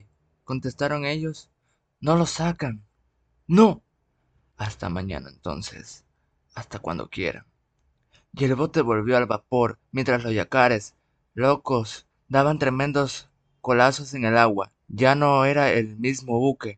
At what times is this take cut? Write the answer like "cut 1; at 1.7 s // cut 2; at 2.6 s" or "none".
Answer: cut 1; at 12.1 s // cut 2; at 14.8 s